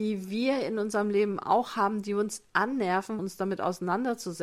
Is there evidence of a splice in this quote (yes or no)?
yes